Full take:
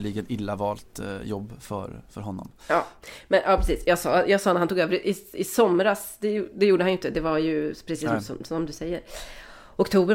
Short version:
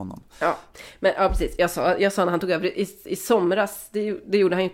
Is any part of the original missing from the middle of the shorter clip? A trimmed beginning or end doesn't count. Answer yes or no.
no